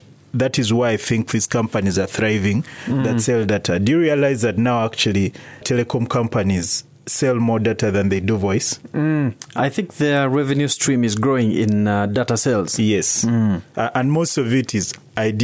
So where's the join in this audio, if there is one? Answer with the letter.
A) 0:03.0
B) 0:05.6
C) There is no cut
B